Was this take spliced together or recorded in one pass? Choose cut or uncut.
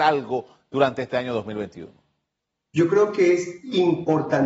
uncut